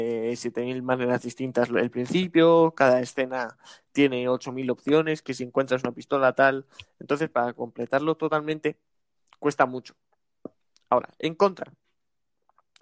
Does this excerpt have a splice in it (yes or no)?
no